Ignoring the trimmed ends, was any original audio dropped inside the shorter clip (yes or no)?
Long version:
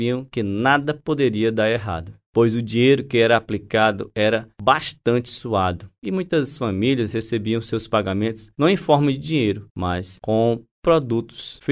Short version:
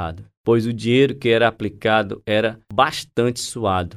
no